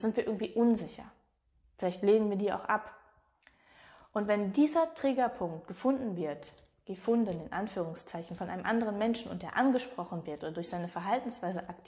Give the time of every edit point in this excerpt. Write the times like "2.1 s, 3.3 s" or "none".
none